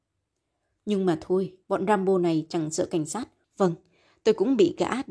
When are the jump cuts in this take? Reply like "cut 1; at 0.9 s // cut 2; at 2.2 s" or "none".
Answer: cut 1; at 1.6 s // cut 2; at 3.4 s